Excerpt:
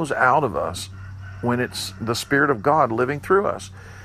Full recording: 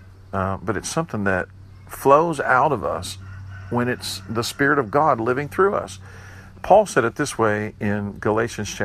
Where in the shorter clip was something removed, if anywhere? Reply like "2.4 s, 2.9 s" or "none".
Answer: none

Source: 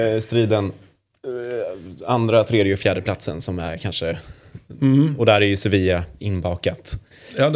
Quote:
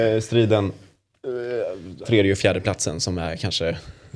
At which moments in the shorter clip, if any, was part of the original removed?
2.0 s

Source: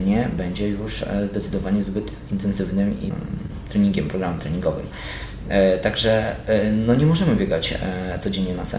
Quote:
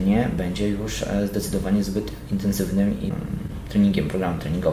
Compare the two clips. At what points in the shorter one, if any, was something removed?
none

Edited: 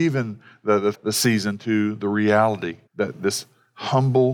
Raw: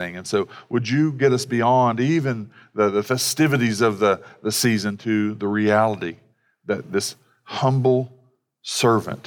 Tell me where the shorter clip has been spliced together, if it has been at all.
0.9 s, 2.9 s

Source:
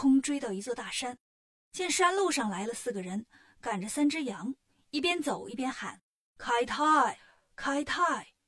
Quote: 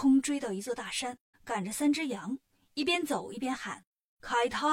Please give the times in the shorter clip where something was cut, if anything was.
1.3 s

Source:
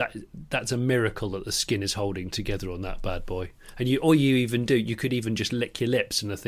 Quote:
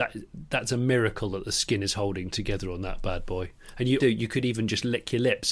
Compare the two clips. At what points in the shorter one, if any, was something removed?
4.0 s

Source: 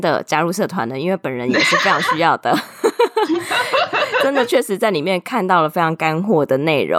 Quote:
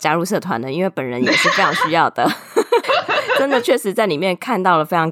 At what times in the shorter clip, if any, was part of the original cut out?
2.8 s

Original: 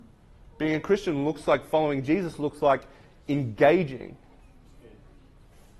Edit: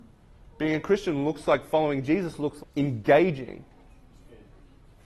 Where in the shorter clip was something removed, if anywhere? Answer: 2.6 s

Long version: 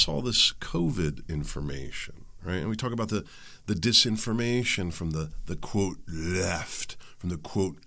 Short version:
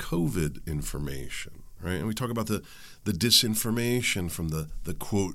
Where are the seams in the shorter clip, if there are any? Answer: none

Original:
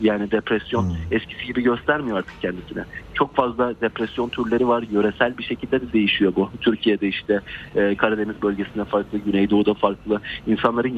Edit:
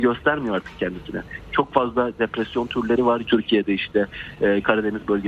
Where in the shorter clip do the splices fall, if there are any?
3.2 s

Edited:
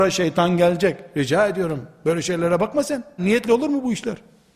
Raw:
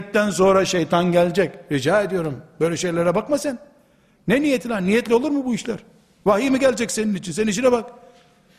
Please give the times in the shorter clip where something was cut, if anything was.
3.2 s

